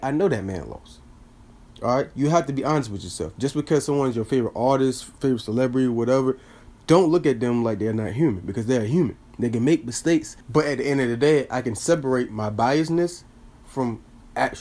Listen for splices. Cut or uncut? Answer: cut